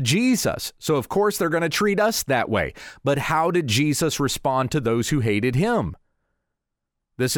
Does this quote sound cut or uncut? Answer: uncut